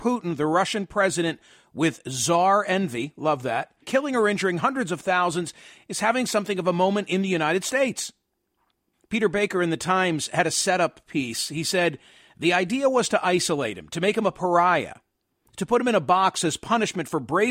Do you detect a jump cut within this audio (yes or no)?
yes